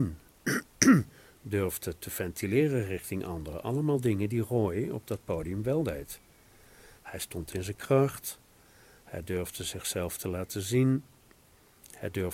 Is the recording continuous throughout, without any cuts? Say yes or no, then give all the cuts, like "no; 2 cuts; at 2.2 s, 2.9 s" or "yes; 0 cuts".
yes; 0 cuts